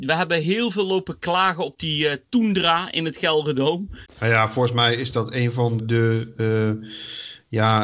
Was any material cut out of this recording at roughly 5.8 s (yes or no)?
yes